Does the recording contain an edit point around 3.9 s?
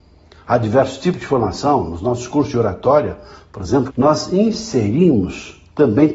yes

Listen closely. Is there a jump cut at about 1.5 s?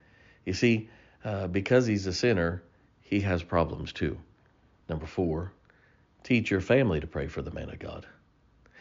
no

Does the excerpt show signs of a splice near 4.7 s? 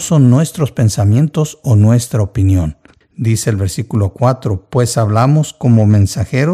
no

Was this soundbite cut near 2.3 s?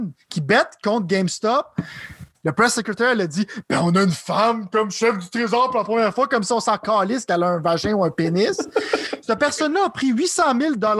yes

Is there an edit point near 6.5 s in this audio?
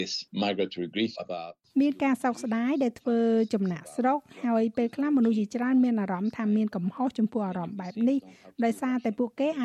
no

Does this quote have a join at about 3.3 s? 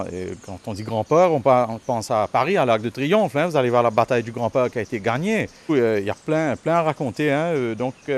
no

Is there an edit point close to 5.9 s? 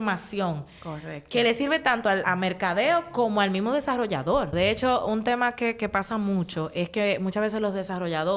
no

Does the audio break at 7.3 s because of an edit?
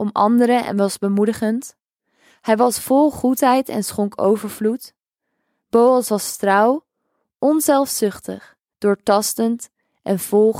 no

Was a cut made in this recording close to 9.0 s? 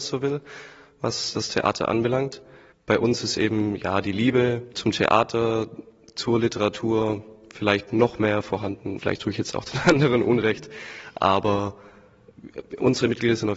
yes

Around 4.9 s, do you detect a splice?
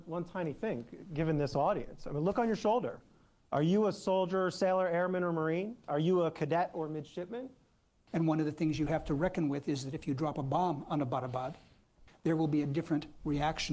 no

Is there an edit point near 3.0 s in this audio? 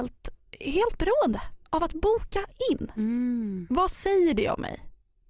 no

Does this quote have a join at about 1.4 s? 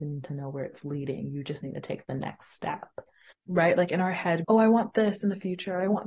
no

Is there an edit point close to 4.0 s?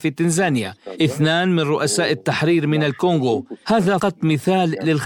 yes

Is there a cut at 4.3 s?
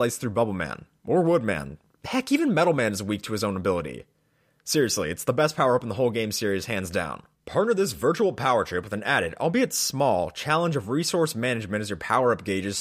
no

